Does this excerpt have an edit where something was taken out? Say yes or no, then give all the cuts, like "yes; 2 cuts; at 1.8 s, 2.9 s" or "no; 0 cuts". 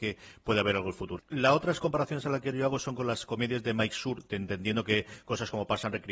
yes; 1 cut; at 1.2 s